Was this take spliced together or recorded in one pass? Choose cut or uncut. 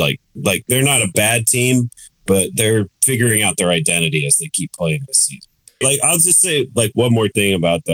cut